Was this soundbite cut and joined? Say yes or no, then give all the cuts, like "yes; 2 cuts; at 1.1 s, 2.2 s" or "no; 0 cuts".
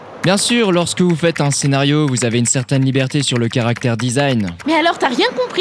yes; 1 cut; at 4.6 s